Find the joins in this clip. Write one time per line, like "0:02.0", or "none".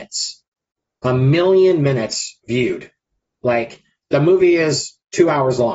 0:02.4

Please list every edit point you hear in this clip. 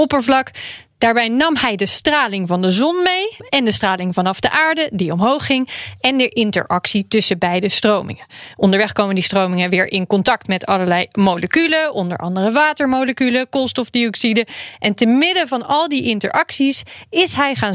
0:03.4

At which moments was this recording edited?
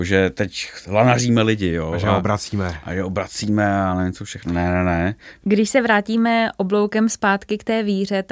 0:05.4

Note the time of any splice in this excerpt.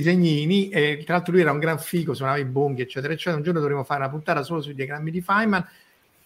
none

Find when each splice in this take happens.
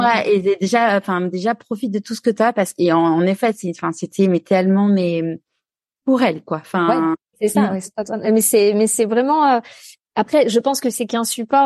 none

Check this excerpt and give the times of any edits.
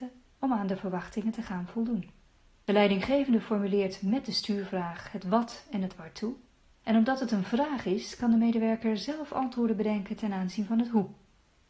none

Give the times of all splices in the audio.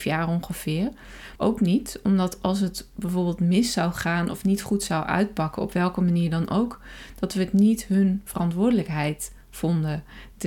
0:01.4

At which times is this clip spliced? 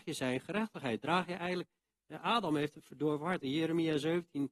none

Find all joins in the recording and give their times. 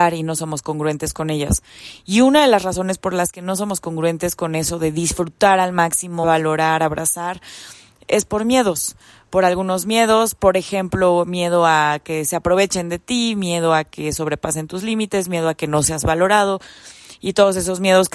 0:06.2

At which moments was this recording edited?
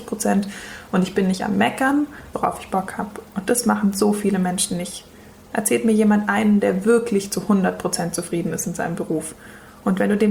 0:02.3

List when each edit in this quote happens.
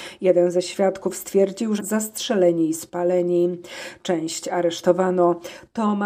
0:01.8

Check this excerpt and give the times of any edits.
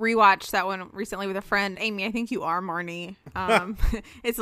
0:01.7

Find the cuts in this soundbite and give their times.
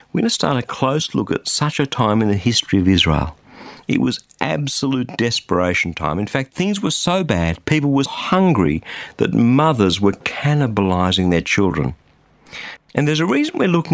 0:08.1
0:12.8

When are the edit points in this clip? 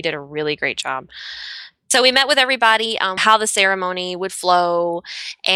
0:03.2

